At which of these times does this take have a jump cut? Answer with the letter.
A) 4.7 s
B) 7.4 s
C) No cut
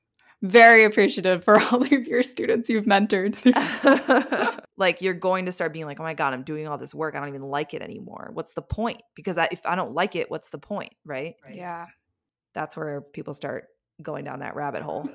A